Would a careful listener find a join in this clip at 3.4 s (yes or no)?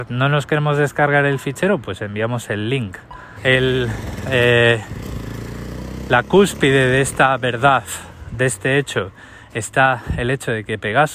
yes